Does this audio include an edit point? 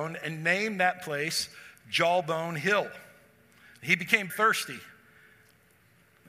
yes; 1 cut; at 4.3 s

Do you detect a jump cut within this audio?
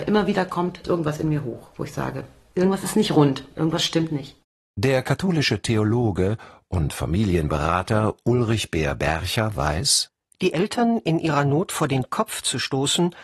no; 0 cuts

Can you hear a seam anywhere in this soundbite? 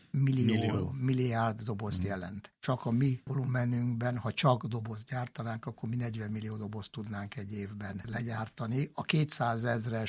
no; 0 cuts

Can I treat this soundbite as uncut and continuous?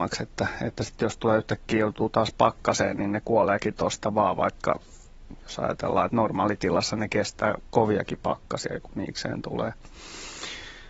yes; 0 cuts

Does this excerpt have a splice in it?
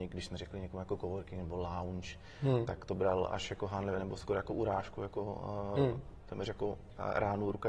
no; 0 cuts

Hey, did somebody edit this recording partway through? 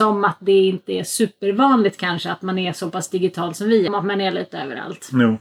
yes; 1 cut; at 3.9 s

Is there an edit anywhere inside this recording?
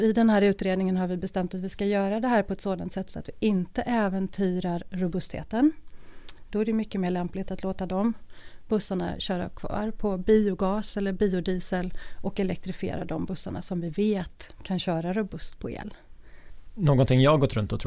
yes; 1 cut; at 6.5 s

